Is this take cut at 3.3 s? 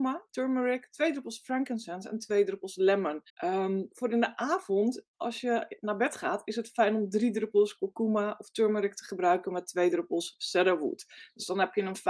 yes; 1 cut; at 3.3 s

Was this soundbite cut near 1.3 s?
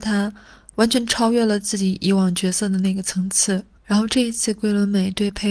no; 1 cut; at 3.8 s

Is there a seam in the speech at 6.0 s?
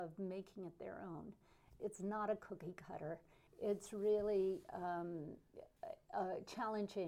no; 2 cuts; at 1.8 s, 3.5 s

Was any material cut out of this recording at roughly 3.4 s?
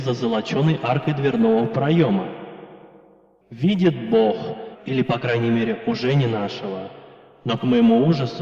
yes; 2 cuts; at 3.4 s, 4.7 s

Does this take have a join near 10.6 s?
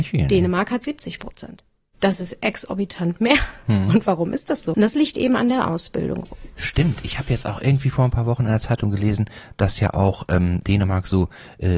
yes; 2 cuts; at 4.7 s, 10.6 s

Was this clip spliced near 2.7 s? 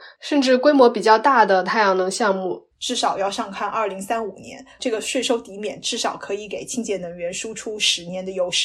yes; 2 cuts; at 2.7 s, 4.8 s

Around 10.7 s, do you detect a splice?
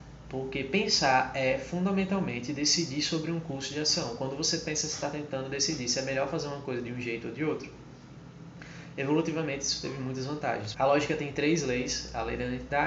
yes; 1 cut; at 10.7 s

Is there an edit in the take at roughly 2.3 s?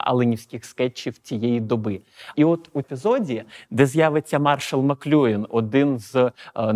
yes; 1 cut; at 2.3 s

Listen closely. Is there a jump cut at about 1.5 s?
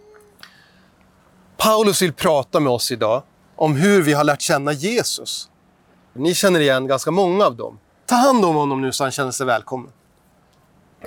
no; 2 cuts; at 6.2 s, 8.1 s

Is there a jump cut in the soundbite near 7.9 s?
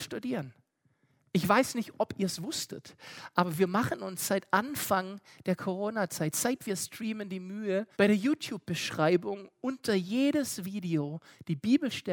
yes; 1 cut; at 7.9 s

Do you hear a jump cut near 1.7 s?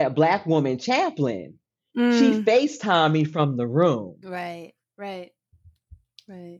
no; 0 cuts

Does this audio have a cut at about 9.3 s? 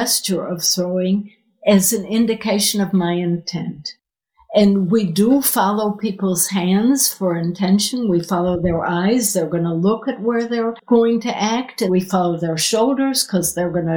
no; 1 cut; at 11.9 s

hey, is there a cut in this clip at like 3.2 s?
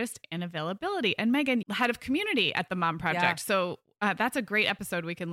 no; 1 cut; at 1.6 s

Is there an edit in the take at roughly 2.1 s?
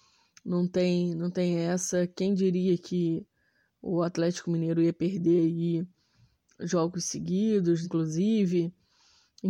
no; 1 cut; at 7.8 s

